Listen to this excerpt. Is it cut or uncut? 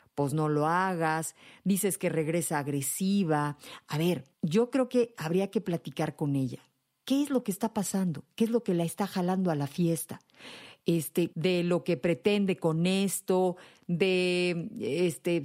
cut